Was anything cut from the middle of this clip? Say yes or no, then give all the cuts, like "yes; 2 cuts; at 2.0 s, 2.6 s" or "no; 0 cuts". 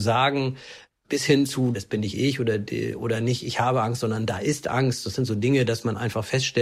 no; 0 cuts